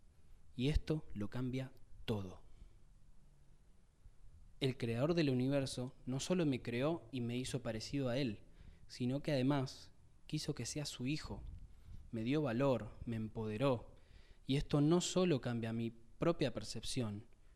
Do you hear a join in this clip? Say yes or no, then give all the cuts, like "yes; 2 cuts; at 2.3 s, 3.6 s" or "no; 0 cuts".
no; 0 cuts